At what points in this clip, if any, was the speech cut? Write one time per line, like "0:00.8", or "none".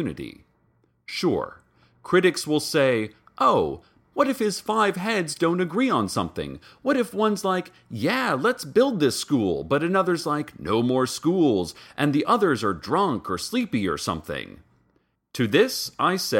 0:04.0
0:15.1